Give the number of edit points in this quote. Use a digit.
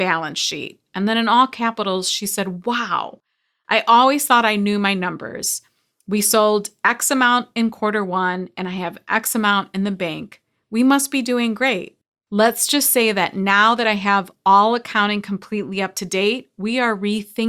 0